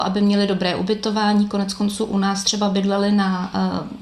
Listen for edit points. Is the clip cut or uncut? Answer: uncut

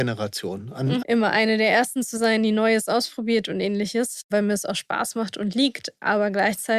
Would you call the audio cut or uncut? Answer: cut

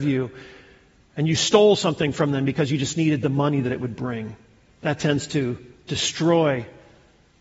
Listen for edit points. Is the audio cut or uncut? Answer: uncut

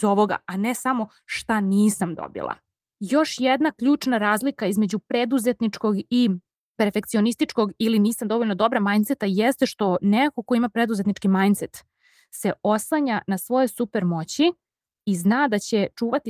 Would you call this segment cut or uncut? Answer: uncut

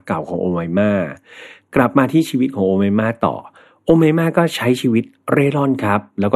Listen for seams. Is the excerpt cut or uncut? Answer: uncut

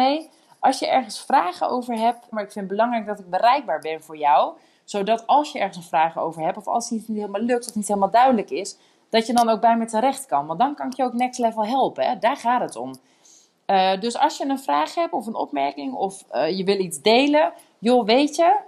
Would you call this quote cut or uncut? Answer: cut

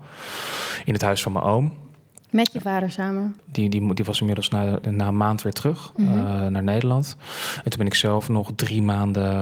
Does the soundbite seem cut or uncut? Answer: cut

